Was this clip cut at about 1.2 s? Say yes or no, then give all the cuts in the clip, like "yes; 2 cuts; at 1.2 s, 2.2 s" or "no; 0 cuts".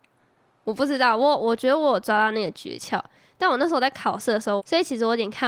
no; 1 cut; at 4.6 s